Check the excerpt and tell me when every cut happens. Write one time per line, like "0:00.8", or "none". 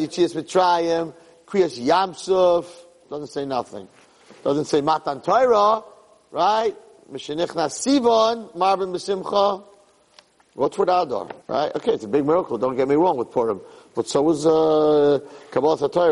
0:11.4